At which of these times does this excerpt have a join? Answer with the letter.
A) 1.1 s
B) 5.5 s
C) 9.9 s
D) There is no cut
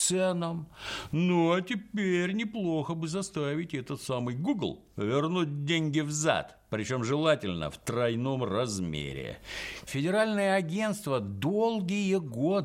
C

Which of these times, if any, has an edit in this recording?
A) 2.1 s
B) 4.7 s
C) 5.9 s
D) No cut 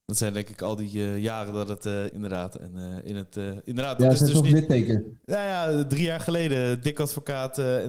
A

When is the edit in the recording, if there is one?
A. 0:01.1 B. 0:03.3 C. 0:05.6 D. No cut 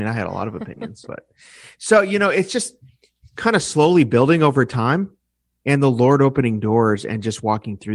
A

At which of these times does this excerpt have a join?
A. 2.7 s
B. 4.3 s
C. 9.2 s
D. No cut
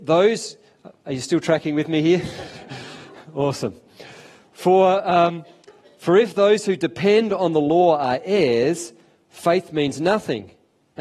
D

